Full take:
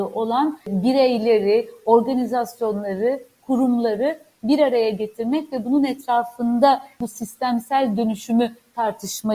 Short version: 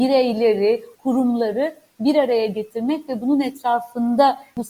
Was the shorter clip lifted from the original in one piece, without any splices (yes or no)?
no